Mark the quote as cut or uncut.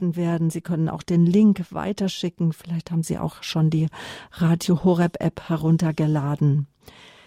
uncut